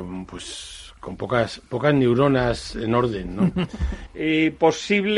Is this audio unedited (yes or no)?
no